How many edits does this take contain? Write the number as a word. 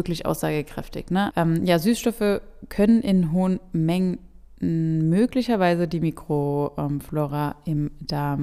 one